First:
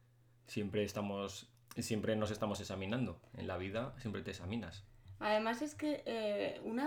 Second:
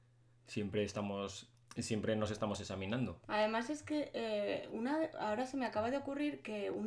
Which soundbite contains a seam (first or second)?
second